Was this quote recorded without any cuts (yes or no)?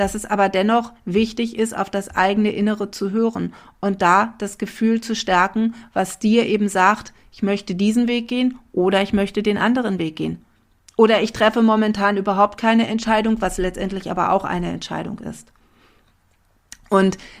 yes